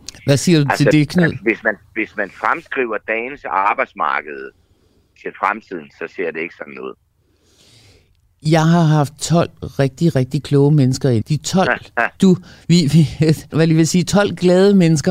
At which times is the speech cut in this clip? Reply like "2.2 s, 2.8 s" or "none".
11.2 s, 13.5 s